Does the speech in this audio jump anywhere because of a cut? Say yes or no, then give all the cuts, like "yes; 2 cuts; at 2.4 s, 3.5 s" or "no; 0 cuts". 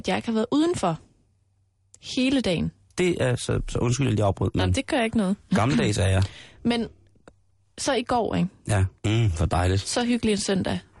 yes; 2 cuts; at 3.0 s, 9.0 s